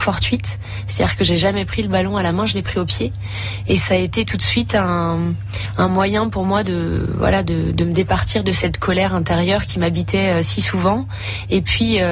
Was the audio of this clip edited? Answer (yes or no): no